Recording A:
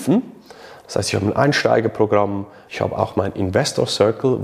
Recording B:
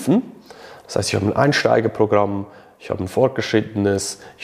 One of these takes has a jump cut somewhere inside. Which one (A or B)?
A